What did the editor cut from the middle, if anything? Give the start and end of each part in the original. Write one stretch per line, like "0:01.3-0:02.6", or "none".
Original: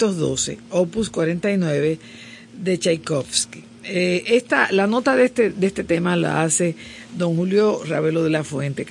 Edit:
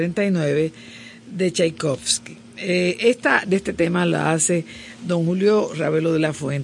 0:04.7-0:05.5